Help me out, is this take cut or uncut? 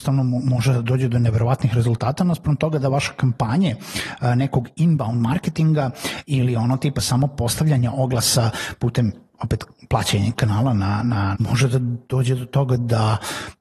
cut